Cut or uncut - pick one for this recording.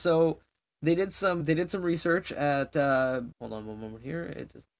cut